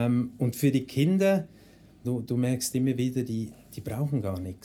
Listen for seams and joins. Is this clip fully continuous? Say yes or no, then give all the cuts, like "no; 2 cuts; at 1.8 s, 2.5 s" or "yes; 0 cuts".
no; 1 cut; at 2.0 s